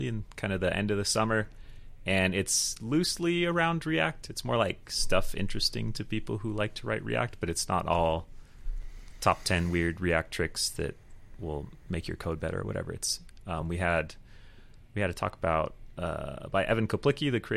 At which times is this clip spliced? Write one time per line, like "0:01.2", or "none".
none